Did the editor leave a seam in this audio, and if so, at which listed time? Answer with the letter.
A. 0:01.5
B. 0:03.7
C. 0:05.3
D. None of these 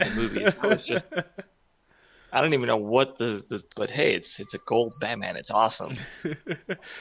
B